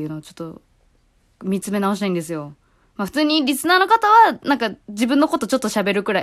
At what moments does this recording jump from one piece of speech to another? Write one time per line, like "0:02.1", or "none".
none